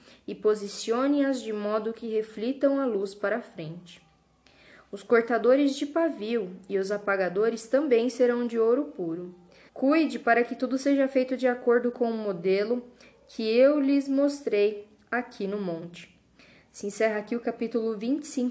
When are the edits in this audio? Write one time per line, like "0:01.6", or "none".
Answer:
0:09.7